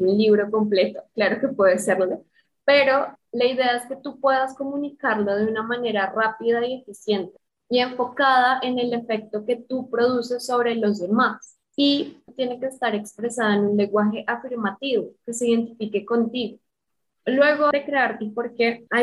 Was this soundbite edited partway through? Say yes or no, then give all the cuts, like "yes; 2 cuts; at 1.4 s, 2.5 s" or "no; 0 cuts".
no; 0 cuts